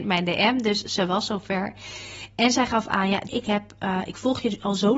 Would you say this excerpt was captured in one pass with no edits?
no; 1 cut; at 3.3 s

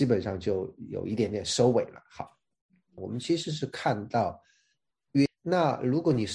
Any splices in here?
yes; 2 cuts; at 3.0 s, 5.3 s

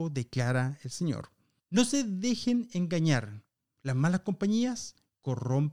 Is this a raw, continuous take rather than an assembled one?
no; 1 cut; at 1.6 s

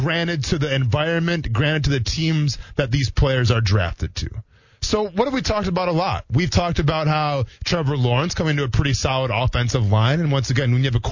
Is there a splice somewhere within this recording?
no; 0 cuts

